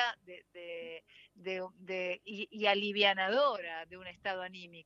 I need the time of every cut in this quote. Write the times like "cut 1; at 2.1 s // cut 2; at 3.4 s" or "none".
none